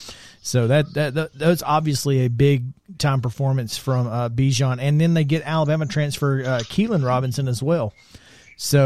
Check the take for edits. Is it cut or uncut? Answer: uncut